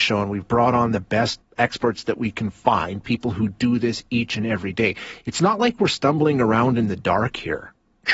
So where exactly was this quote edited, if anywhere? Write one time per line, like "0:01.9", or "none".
0:01.4